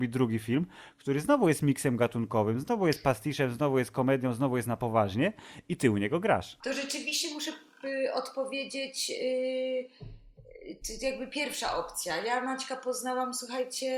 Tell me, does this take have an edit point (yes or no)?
no